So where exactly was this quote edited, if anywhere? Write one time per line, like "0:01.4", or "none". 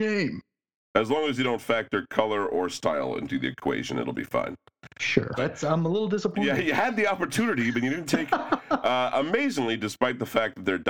0:05.4